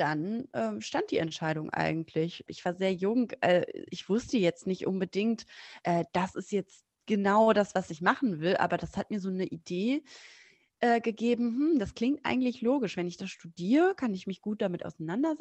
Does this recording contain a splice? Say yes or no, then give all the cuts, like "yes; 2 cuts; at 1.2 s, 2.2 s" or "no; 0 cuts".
yes; 1 cut; at 2.5 s